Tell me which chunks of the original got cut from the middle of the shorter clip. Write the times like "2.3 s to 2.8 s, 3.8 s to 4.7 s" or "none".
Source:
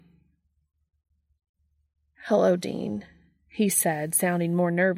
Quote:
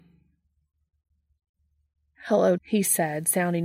2.6 s to 3.4 s